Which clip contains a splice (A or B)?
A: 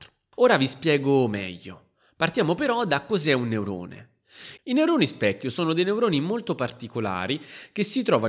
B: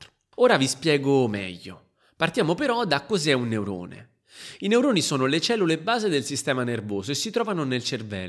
A